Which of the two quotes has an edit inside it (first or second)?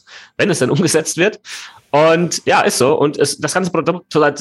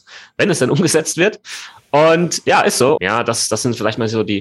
second